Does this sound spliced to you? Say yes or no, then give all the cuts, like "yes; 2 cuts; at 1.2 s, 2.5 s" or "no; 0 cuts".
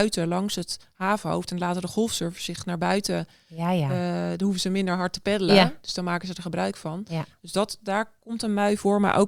no; 0 cuts